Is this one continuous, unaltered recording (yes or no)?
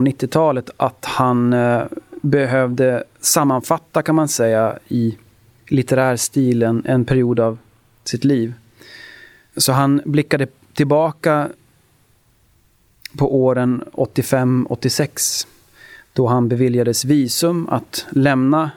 yes